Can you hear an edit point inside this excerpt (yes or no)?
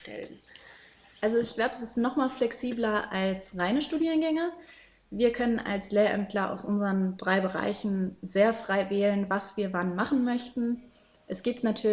no